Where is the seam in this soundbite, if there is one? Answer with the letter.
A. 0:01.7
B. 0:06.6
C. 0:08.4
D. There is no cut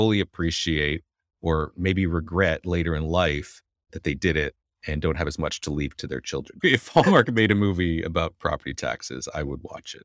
B